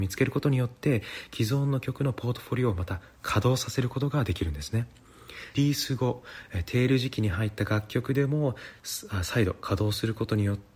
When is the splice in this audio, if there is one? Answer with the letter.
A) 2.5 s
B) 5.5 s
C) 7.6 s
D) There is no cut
B